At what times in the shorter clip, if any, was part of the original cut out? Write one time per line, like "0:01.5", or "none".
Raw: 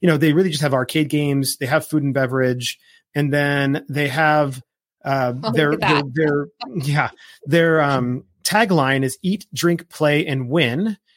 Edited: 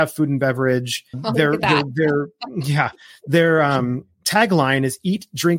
0:01.1

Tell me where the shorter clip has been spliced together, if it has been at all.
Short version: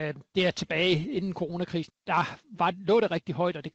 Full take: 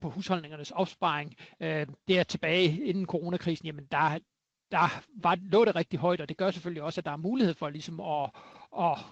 0:01.9

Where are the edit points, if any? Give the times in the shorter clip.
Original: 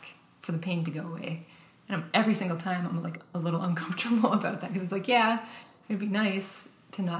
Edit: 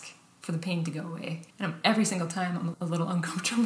0:01.5
0:02.7

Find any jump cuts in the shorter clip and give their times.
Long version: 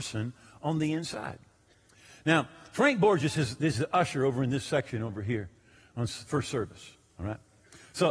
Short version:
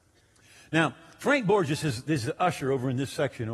none

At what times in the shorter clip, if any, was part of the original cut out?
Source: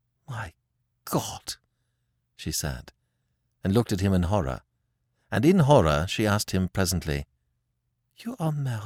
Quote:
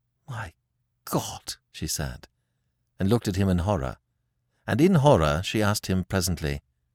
0:01.6

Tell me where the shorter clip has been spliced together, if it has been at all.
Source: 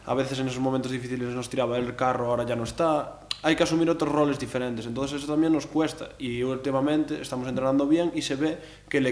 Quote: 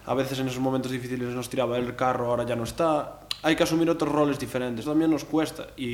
0:04.8

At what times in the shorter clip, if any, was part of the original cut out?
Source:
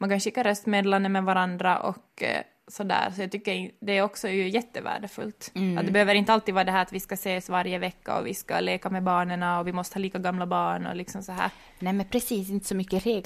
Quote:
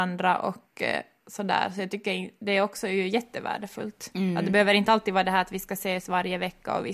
none

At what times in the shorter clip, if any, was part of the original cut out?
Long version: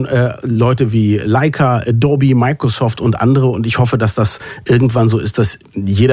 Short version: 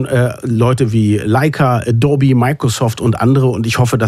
none

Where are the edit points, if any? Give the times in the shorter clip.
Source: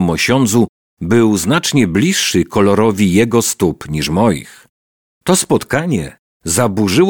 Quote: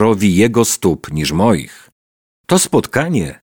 none

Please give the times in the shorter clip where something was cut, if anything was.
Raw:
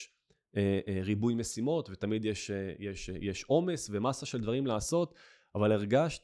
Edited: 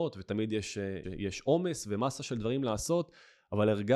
0:01.0

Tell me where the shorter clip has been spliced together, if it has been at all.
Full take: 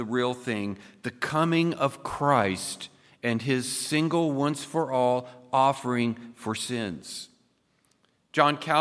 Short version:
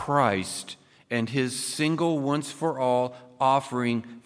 none

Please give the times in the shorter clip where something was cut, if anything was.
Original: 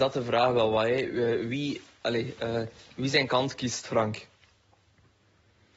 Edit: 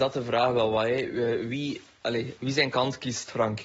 0:02.4

